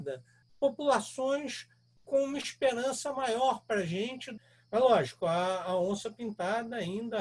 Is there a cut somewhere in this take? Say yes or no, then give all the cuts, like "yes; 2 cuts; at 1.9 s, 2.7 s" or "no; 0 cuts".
no; 0 cuts